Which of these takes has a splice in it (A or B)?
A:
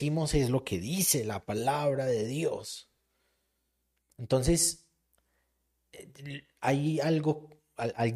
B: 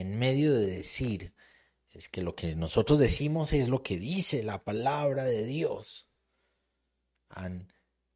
A